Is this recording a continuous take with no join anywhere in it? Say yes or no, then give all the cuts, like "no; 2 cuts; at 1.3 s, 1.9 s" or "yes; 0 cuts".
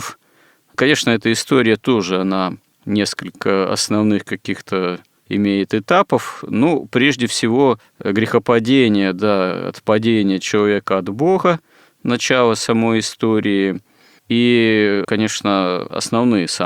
yes; 0 cuts